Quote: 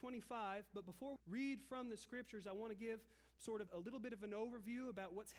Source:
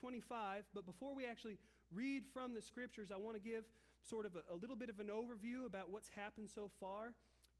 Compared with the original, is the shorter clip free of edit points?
no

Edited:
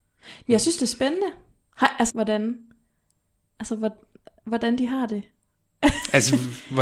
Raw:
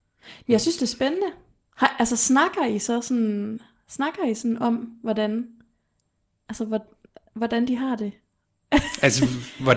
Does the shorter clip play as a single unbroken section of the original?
no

